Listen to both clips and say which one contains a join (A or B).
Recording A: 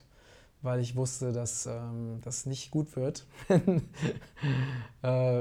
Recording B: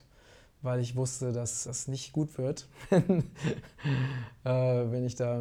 B